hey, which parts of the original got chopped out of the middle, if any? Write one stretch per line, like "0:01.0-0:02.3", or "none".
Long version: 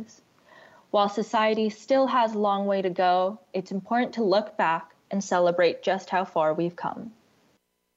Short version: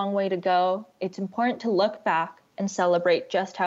none

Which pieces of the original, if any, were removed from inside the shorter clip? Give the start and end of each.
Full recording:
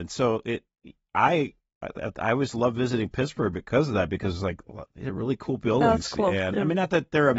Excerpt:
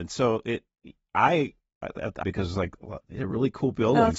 0:02.2-0:04.1

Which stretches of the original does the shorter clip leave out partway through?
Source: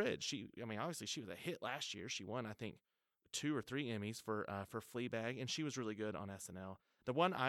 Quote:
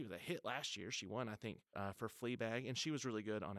0:02.9-0:04.5

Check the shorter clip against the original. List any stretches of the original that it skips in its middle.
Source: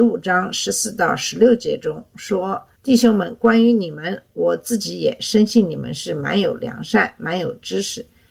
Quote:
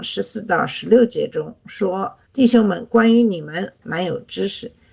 0:04.3-0:07.2

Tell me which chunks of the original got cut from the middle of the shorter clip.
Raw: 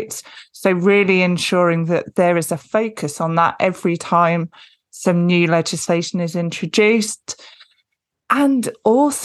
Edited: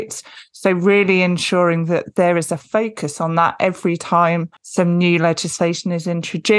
0:04.6-0:04.9

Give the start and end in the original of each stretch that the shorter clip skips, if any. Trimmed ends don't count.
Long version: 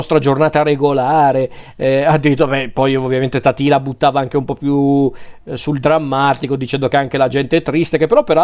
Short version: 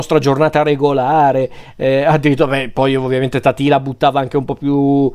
none

